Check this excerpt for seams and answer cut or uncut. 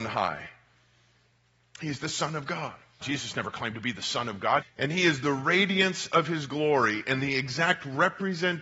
cut